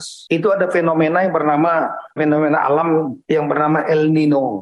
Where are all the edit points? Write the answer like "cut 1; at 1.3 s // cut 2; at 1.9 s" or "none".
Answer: cut 1; at 2.2 s